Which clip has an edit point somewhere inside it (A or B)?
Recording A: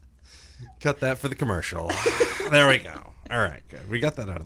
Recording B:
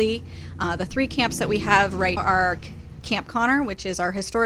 B